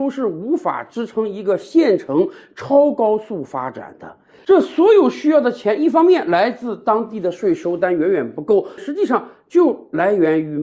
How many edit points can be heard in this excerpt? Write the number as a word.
two